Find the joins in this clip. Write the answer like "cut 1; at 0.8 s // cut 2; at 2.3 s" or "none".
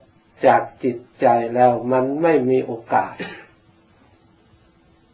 none